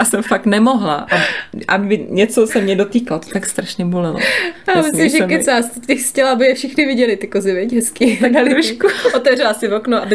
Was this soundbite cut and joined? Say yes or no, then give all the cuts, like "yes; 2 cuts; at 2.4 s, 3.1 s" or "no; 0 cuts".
no; 0 cuts